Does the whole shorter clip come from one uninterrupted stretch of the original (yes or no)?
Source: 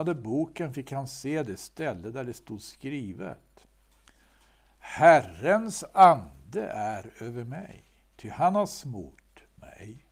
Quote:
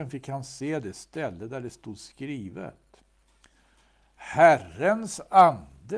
yes